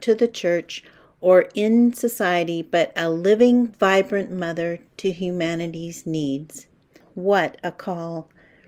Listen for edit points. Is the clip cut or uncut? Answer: cut